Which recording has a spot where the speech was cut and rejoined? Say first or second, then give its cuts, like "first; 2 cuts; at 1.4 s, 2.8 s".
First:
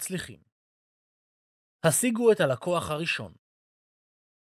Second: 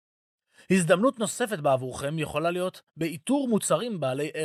first; 1 cut; at 1.7 s